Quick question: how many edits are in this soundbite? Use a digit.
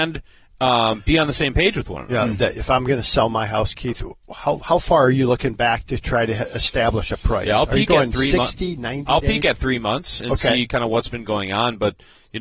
1